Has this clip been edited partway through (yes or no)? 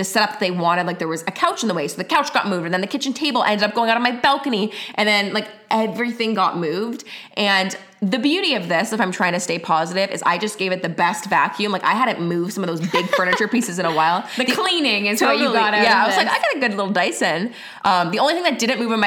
no